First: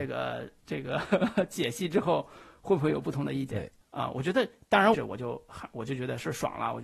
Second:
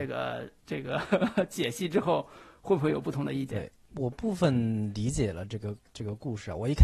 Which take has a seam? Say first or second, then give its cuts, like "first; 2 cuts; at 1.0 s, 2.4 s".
first; 2 cuts; at 3.8 s, 4.9 s